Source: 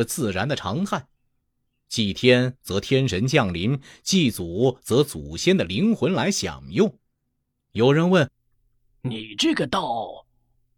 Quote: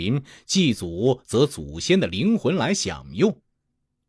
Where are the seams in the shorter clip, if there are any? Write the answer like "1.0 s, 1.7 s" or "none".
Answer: none